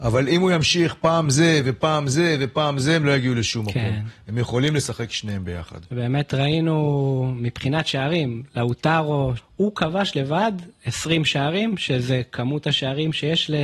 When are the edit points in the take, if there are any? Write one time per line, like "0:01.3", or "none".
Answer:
0:09.4